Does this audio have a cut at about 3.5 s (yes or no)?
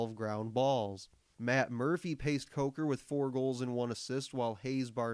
no